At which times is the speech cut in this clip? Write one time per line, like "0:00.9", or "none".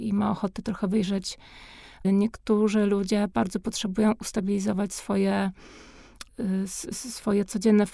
0:02.0
0:06.3